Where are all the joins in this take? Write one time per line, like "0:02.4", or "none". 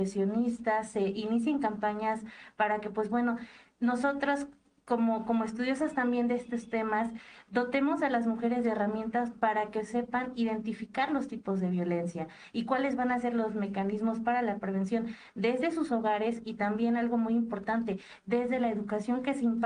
none